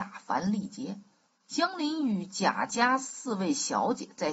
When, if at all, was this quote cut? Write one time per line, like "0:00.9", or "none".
0:01.3